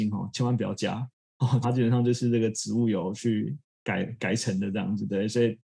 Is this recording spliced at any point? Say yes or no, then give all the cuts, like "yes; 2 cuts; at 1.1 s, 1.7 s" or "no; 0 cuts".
yes; 1 cut; at 1.6 s